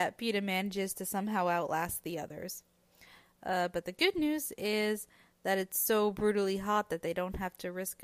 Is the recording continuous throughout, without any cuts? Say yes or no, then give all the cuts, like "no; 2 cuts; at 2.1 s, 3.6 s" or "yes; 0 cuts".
yes; 0 cuts